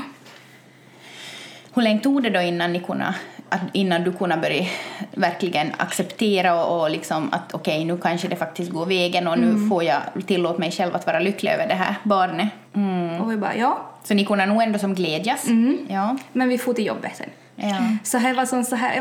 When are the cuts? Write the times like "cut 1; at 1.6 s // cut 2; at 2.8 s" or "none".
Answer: cut 1; at 12.6 s